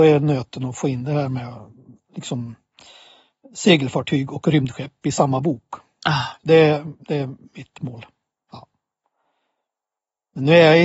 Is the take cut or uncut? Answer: cut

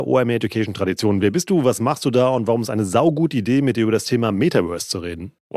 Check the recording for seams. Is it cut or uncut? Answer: uncut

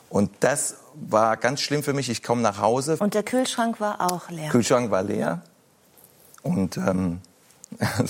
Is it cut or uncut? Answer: cut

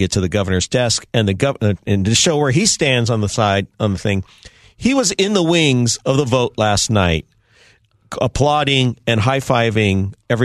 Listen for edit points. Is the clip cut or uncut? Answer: uncut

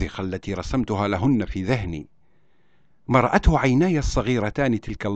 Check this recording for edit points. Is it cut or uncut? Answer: uncut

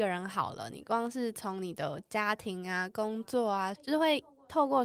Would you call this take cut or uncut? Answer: cut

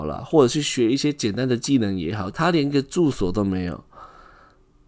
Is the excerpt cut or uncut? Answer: cut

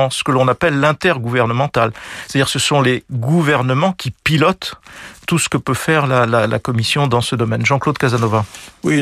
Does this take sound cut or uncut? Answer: uncut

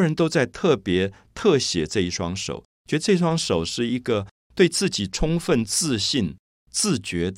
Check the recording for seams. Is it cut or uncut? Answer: uncut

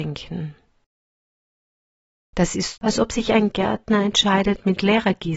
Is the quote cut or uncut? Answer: cut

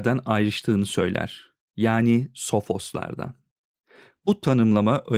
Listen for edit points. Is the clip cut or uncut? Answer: uncut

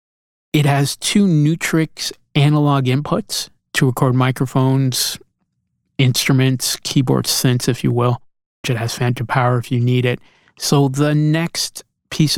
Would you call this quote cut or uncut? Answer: cut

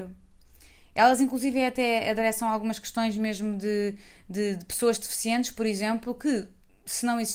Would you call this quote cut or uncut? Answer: uncut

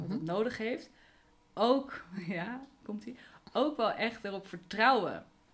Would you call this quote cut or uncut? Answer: uncut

